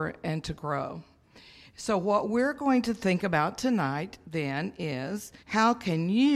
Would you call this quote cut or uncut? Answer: cut